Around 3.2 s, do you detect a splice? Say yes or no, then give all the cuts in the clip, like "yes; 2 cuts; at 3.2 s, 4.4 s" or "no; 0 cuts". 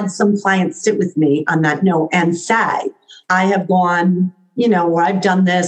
yes; 1 cut; at 3.2 s